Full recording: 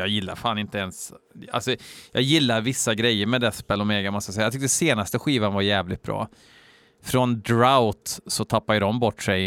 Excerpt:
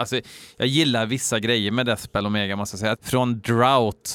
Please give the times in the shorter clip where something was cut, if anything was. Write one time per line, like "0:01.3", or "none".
0:02.9

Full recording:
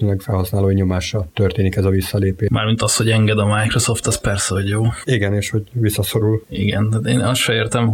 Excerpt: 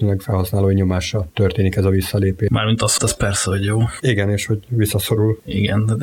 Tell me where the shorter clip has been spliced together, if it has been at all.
0:03.0

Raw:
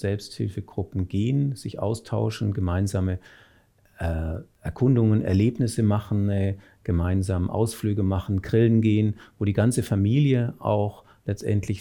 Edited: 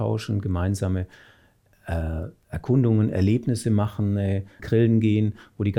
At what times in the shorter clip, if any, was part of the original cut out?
0:04.6

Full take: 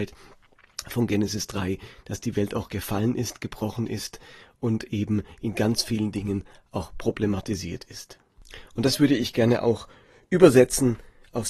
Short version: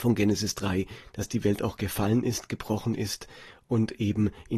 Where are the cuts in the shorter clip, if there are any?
none

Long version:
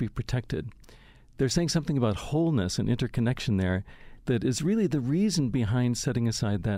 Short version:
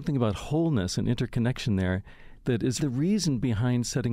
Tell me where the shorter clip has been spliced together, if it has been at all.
0:02.8

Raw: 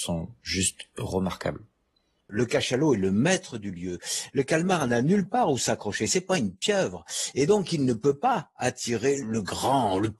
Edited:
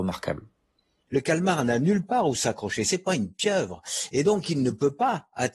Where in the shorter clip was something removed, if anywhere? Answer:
0:01.1

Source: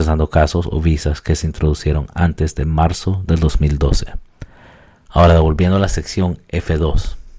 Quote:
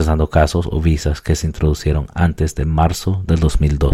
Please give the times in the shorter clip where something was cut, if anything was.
none

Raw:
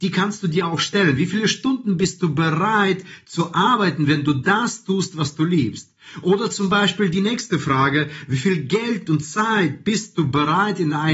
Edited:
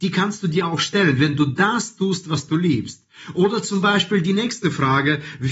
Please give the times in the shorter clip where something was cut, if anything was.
0:01.2

